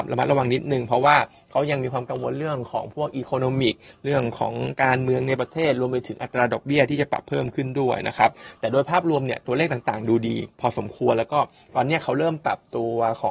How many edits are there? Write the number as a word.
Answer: one